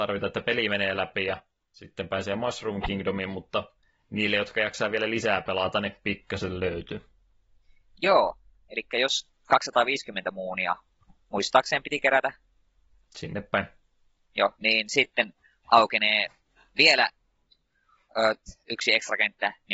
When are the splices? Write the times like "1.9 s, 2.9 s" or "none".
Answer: none